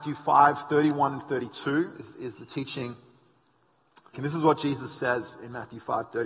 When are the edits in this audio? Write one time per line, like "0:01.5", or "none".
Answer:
0:04.1